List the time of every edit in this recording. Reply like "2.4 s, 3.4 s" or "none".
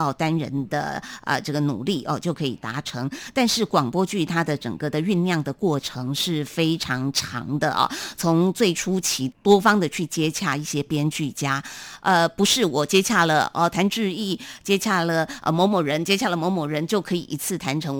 9.3 s